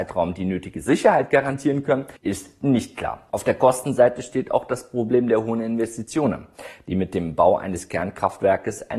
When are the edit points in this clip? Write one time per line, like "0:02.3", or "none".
0:02.2